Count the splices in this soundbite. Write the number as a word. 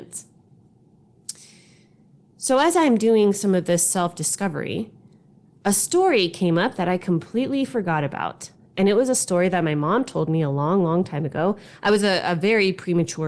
zero